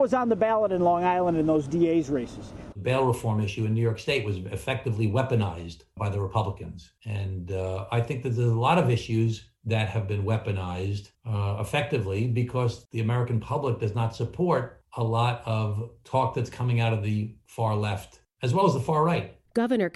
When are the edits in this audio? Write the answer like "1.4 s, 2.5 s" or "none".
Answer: 2.7 s